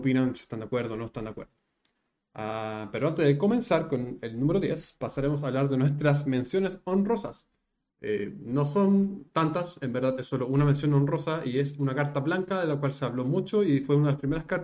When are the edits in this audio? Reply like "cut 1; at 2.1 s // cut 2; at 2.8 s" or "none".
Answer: none